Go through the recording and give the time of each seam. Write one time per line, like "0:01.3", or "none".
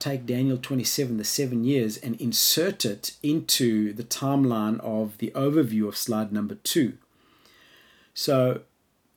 none